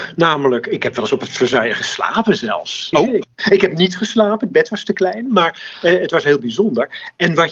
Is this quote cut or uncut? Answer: cut